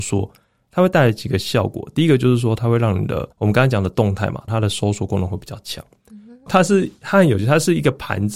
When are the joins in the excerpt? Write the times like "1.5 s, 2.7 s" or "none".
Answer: 3.3 s, 4.5 s, 6.5 s